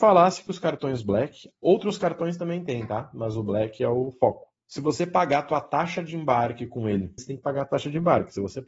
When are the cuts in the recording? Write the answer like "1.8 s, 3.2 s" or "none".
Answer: 4.6 s, 7.2 s